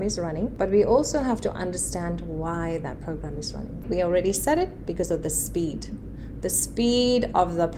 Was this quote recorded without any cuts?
no; 1 cut; at 3.8 s

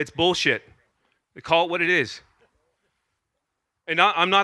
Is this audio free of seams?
yes; 0 cuts

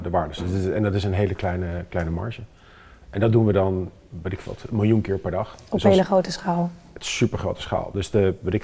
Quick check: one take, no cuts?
yes; 0 cuts

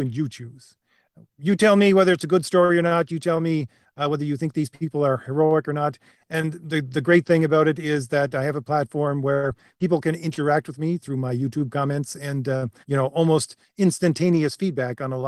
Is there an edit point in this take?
yes; 2 cuts; at 6.2 s, 12.8 s

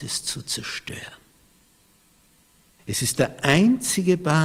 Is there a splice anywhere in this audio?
yes; 1 cut; at 2.8 s

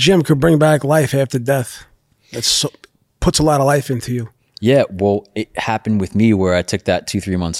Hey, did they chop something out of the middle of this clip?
no; 0 cuts

